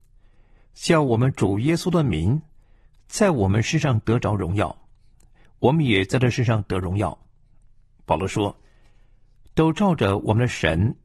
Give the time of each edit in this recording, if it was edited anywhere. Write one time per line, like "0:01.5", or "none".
none